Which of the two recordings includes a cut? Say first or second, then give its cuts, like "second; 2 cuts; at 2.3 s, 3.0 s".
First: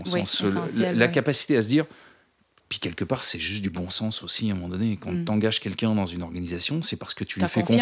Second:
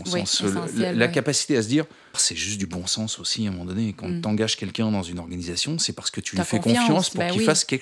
second; 1 cut; at 2.1 s